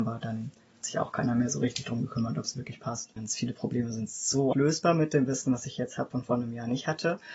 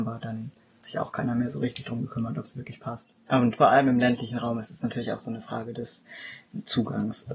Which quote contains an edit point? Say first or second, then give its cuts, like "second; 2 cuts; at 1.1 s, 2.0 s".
first; 2 cuts; at 3.2 s, 4.5 s